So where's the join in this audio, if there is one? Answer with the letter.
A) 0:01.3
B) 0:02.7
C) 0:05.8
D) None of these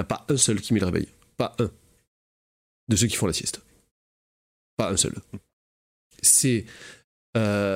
D